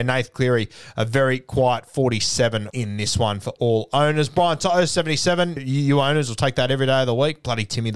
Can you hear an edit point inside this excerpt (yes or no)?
yes